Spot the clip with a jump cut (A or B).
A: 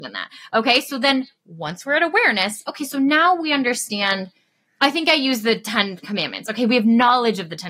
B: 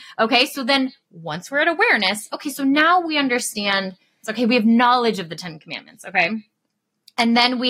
B